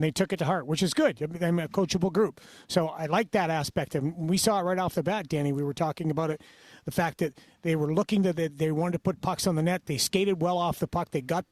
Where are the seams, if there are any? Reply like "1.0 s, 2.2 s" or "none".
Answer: none